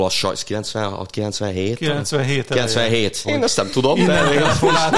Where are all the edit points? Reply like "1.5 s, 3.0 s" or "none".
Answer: 3.2 s